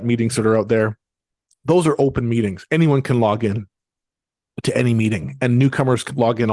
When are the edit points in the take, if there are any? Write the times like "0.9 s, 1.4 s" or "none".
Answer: none